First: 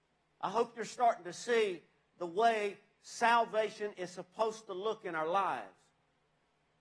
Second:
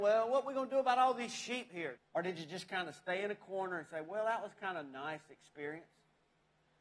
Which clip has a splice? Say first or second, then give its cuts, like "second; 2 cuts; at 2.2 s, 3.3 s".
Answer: second; 1 cut; at 2.0 s